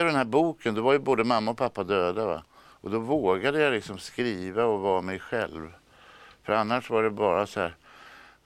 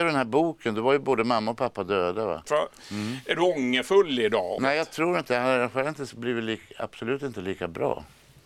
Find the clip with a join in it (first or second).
second